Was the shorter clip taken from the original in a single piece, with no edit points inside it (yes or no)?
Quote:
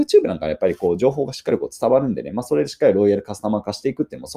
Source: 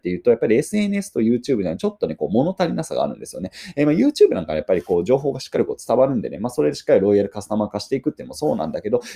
yes